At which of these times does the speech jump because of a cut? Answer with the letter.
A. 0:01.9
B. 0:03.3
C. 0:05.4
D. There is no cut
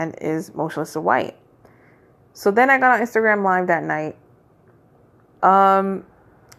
C